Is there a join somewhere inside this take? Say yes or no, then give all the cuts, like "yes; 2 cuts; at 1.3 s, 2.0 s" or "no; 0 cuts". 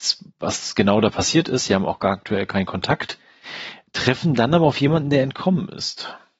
no; 0 cuts